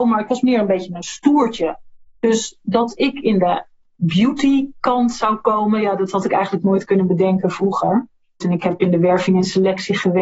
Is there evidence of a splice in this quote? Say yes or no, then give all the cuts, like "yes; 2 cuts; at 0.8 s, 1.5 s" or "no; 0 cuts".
yes; 1 cut; at 8.4 s